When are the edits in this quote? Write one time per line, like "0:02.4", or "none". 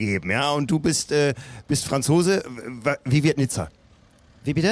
none